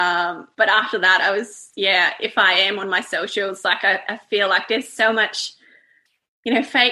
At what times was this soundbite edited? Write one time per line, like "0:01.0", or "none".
none